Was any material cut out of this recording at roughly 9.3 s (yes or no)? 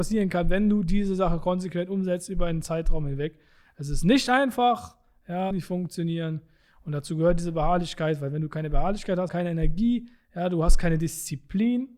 yes